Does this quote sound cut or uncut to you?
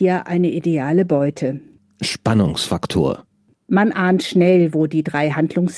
uncut